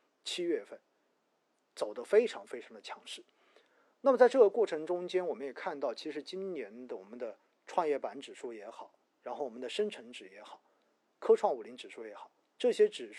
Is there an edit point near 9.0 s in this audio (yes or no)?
yes